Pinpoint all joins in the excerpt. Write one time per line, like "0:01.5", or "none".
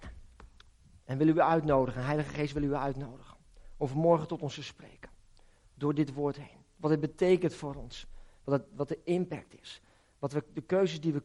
none